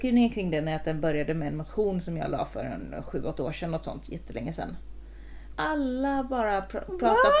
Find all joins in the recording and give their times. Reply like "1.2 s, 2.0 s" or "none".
5.5 s